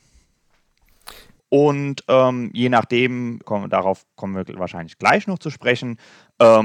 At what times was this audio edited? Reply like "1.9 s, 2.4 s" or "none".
1.4 s, 3.4 s